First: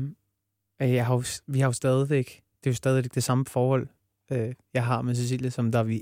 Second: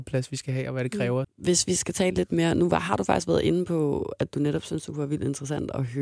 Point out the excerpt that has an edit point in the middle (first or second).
second